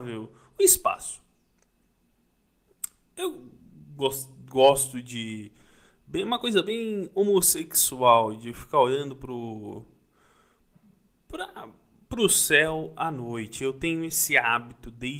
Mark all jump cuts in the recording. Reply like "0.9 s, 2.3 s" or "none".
none